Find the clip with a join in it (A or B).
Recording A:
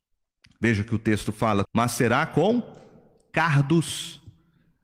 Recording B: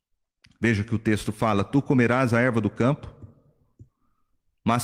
A